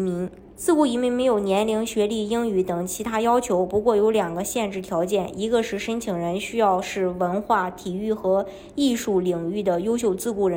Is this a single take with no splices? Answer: yes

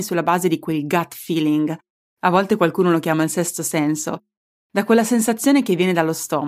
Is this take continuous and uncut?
yes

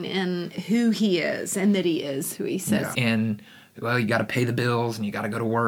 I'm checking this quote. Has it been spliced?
yes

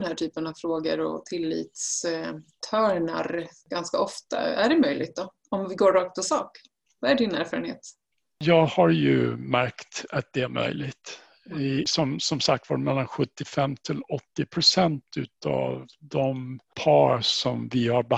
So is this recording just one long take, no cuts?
yes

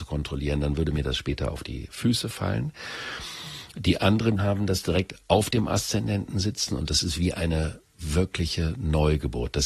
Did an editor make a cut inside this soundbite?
yes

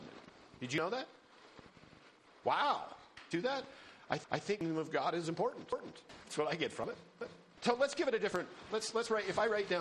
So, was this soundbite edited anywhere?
yes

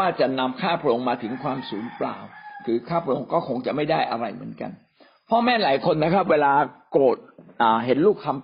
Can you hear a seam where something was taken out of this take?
no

